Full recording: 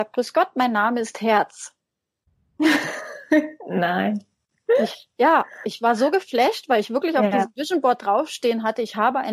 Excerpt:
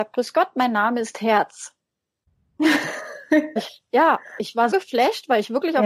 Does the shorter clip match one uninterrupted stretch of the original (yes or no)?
no